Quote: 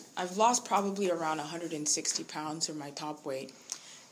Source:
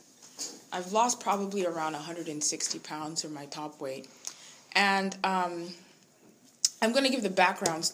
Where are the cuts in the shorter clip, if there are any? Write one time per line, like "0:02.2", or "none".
none